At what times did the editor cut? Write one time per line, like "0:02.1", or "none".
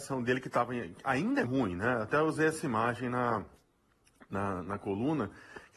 0:01.4
0:04.6